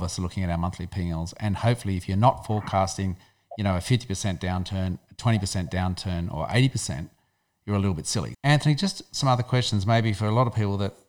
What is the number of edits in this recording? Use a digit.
1